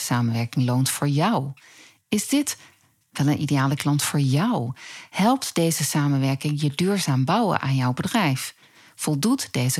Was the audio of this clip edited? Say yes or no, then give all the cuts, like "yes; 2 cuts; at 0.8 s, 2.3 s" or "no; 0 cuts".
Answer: no; 0 cuts